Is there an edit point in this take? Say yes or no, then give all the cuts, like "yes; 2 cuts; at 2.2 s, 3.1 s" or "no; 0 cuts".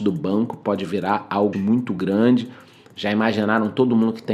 yes; 1 cut; at 1.5 s